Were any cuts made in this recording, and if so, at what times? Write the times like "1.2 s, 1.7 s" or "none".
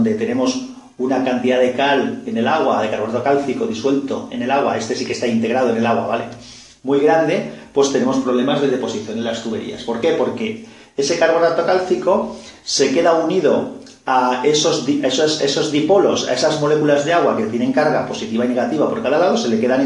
none